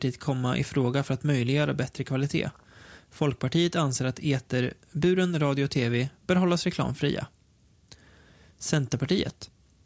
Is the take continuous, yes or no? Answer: yes